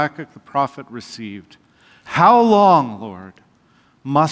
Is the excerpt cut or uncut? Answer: uncut